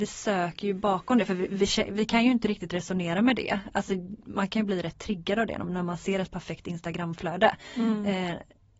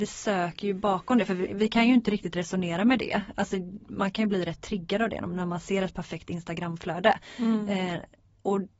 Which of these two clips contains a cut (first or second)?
second